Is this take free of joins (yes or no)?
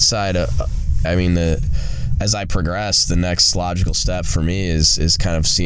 no